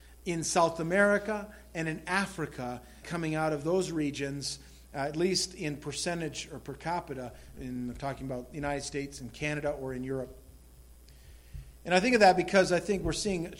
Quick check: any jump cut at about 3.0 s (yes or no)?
yes